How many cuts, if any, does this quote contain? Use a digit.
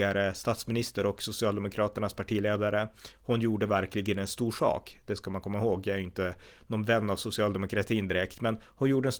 0